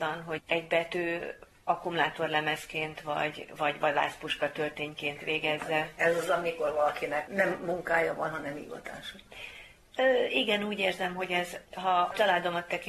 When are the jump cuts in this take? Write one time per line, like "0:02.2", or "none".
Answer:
none